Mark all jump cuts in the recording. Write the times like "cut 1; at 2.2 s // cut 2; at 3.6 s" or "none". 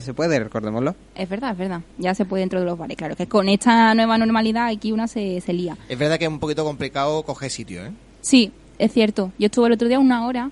none